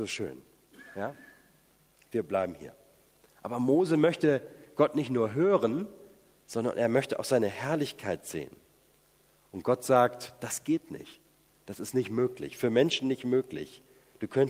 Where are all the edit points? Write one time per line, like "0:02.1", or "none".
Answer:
0:03.2